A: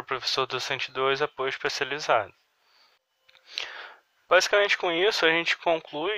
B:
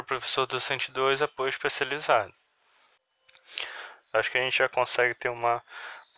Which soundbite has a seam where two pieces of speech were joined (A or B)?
B